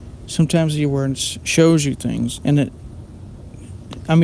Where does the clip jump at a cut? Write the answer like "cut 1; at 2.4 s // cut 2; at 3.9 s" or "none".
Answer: cut 1; at 2.4 s